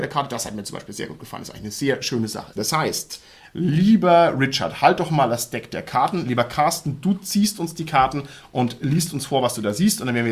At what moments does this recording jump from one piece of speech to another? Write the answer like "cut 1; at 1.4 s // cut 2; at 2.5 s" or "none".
cut 1; at 2.6 s